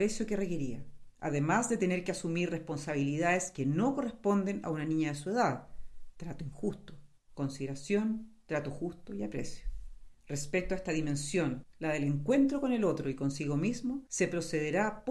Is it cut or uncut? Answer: cut